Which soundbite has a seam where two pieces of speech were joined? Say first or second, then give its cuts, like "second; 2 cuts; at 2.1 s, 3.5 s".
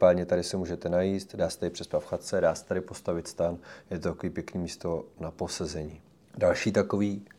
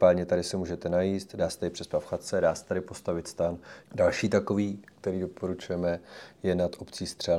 second; 1 cut; at 3.8 s